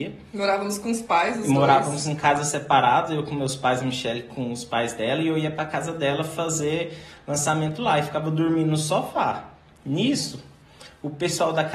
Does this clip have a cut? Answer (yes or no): no